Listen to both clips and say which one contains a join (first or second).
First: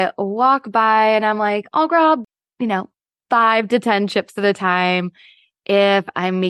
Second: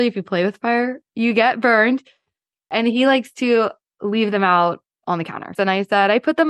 second